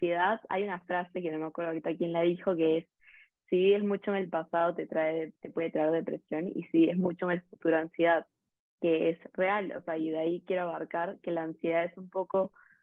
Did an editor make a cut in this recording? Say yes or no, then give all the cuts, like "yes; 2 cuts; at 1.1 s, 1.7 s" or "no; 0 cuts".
no; 0 cuts